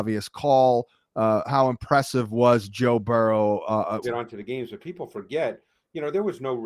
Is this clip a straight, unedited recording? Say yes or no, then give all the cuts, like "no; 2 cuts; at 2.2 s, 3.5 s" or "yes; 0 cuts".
no; 1 cut; at 4.0 s